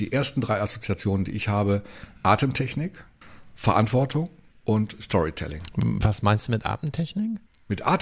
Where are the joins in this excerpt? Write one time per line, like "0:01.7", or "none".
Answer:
none

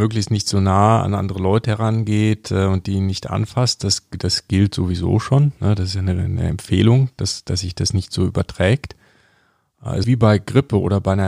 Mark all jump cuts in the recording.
0:10.0

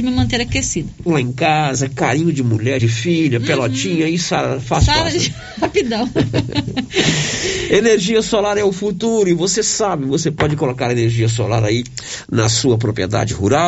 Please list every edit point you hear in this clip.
0:01.1
0:02.8

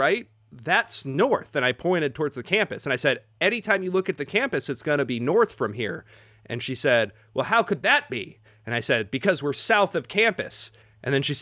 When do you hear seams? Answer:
none

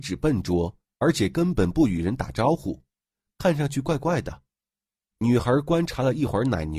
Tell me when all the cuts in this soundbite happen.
0:05.1

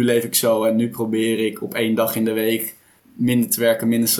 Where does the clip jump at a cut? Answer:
none

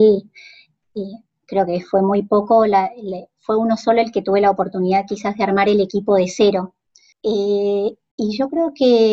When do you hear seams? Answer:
0:07.1

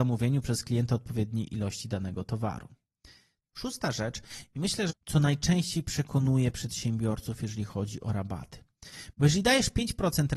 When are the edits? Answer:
0:03.5
0:04.9
0:09.1

